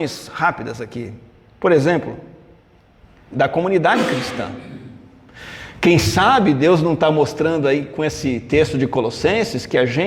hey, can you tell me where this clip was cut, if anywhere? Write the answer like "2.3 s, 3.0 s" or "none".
3.3 s